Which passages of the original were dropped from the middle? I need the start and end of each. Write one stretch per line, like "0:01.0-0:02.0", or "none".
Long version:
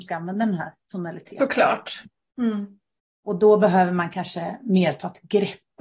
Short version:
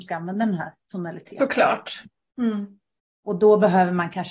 none